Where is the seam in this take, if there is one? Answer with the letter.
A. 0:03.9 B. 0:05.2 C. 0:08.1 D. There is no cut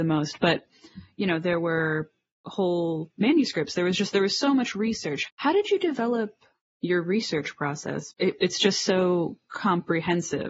B